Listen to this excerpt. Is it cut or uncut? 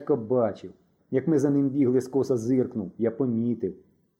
cut